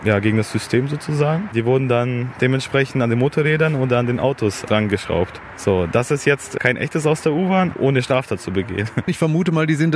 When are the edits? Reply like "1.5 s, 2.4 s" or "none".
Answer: 7.7 s